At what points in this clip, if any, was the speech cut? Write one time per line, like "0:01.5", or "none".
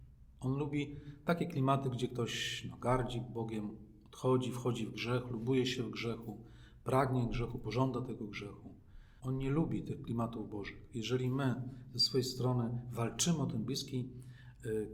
0:09.2

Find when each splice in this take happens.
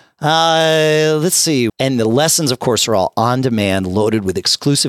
0:01.7

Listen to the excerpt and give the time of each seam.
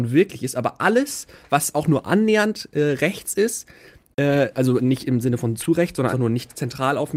0:06.1

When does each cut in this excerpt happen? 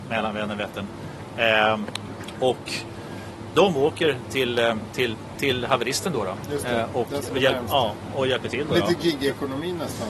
none

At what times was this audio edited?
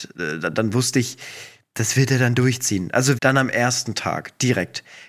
0:03.2

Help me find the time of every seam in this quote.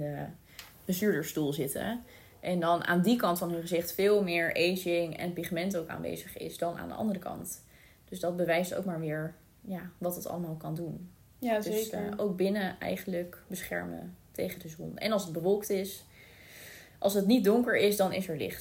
none

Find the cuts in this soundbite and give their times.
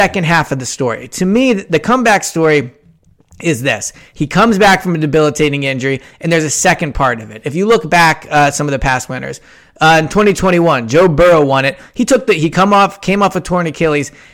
none

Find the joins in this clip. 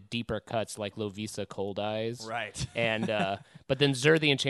none

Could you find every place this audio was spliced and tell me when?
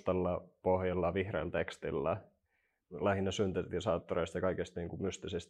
0:02.8

